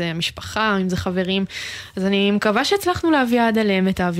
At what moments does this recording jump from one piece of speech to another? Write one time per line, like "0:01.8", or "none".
none